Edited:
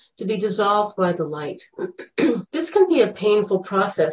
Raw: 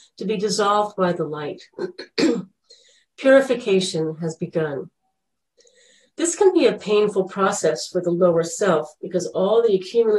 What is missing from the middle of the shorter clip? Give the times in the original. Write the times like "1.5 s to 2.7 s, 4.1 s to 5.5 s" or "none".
2.4 s to 6.1 s